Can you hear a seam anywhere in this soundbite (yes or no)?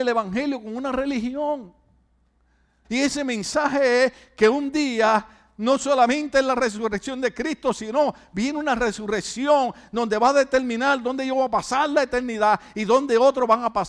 yes